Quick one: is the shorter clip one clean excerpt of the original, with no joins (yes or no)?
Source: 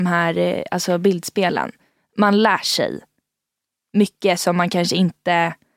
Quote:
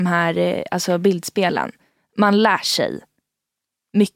yes